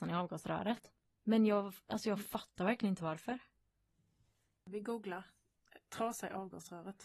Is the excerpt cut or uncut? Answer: uncut